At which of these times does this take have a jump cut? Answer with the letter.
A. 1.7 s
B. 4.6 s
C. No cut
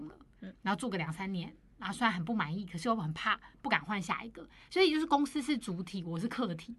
C